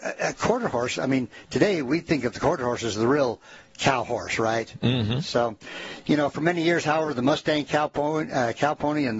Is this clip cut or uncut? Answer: uncut